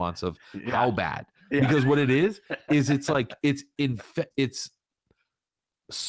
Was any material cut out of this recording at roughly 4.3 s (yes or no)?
yes